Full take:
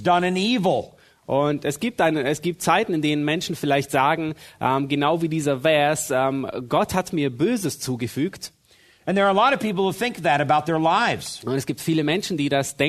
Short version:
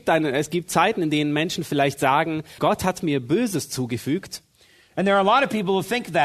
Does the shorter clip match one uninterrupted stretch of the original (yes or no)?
no